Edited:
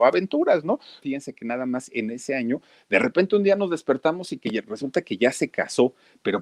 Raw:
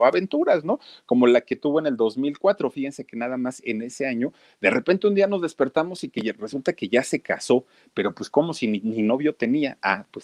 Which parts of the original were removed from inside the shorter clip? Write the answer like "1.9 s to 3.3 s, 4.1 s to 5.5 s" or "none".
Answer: 1.0 s to 2.7 s